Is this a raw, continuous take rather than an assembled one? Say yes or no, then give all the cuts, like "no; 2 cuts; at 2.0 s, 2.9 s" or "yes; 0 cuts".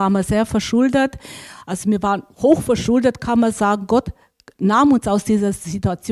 yes; 0 cuts